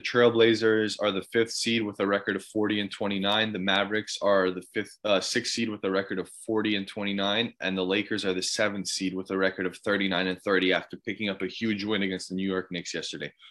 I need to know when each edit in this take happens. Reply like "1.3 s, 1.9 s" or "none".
none